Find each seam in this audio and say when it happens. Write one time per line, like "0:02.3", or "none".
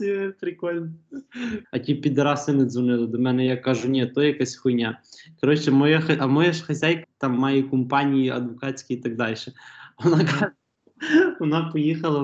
0:01.6
0:07.0